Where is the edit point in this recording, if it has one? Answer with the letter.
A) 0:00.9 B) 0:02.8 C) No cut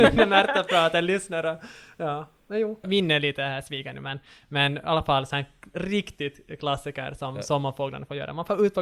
B